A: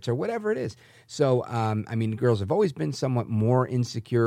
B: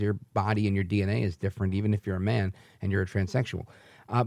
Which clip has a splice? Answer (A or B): A